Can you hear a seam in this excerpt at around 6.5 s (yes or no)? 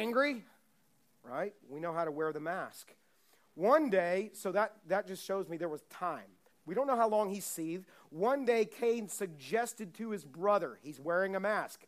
yes